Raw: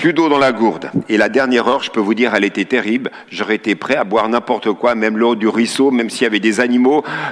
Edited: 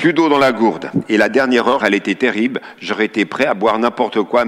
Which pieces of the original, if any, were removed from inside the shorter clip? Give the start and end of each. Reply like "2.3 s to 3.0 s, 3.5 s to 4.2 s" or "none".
1.8 s to 2.3 s